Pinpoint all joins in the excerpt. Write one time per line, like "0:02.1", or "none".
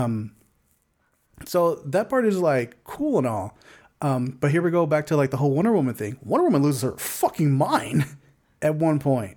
none